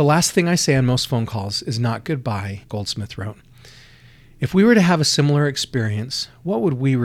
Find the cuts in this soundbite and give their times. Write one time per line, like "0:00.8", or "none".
0:02.6